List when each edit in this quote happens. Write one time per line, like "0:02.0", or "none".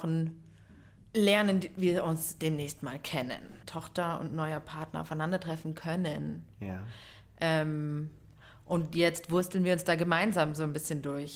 0:03.6